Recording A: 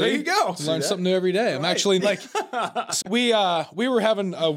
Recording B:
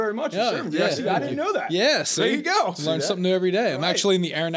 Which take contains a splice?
A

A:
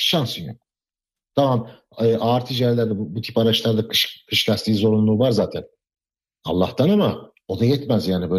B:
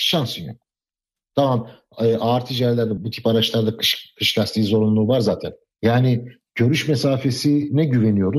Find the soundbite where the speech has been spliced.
B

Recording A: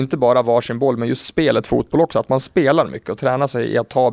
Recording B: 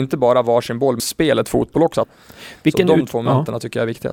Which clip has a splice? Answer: B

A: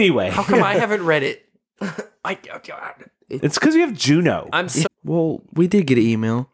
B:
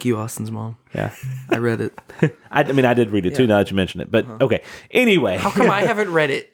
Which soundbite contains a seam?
A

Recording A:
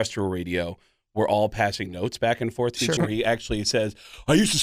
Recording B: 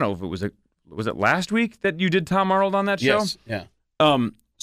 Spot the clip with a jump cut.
A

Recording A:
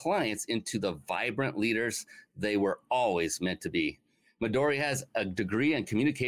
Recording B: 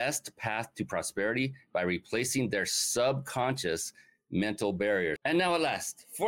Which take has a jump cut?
B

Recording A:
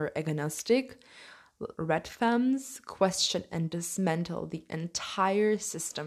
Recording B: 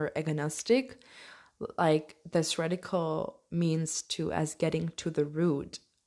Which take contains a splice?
A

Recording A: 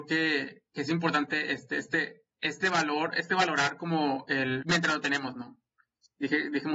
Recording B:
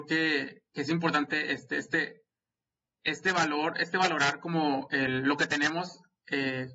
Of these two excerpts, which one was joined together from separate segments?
A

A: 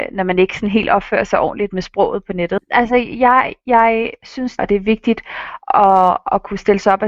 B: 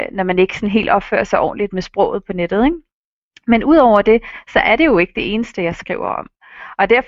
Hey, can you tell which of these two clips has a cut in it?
A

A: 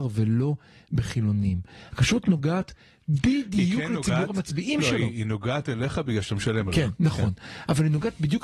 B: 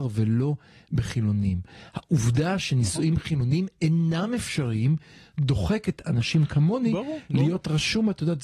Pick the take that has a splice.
A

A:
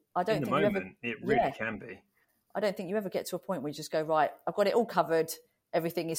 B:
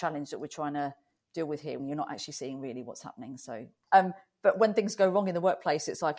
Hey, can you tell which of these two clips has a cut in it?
B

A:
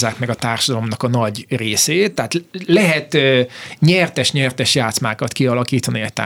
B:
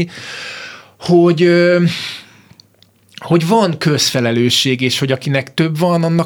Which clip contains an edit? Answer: A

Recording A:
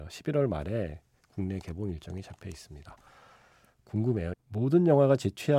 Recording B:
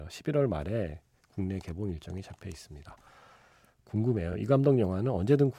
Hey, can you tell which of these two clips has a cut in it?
A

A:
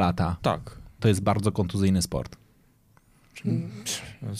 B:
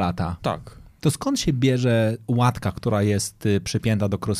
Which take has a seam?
A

